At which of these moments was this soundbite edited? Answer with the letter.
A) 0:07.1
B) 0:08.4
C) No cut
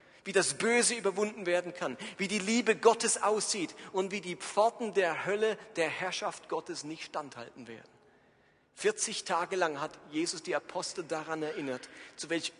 C